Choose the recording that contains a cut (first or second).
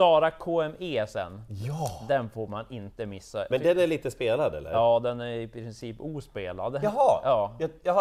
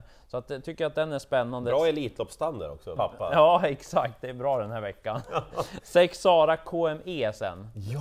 second